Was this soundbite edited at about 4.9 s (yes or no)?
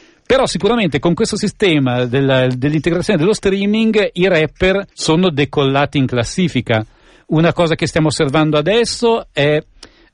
yes